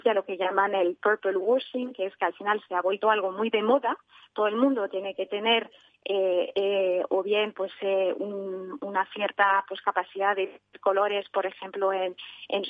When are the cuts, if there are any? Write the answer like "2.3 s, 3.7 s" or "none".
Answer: none